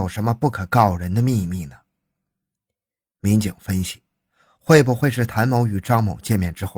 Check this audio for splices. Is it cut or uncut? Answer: uncut